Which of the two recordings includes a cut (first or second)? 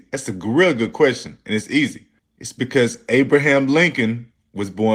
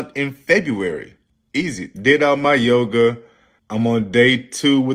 second